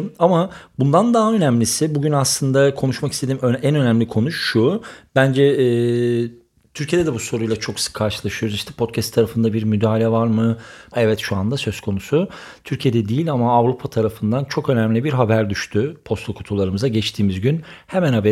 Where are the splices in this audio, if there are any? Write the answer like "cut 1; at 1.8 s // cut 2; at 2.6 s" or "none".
cut 1; at 10.9 s